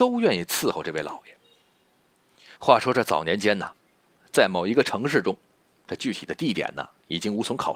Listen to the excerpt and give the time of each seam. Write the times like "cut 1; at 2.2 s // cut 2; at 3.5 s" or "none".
cut 1; at 2.6 s

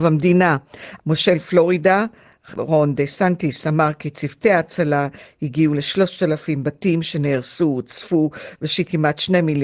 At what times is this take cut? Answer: cut 1; at 1.0 s

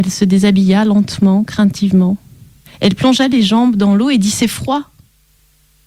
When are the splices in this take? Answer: cut 1; at 2.6 s

